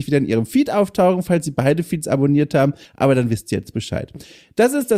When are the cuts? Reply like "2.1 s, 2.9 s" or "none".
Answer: none